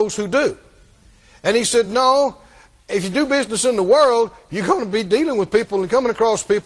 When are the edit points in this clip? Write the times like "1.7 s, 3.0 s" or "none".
none